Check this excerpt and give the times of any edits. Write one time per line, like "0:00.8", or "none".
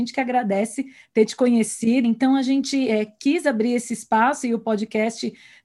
0:02.0